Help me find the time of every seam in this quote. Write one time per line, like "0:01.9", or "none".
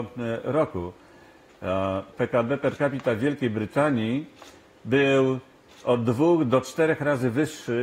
0:02.1